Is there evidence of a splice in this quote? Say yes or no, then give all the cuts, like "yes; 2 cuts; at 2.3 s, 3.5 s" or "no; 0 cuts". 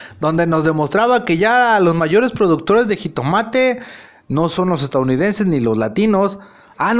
no; 0 cuts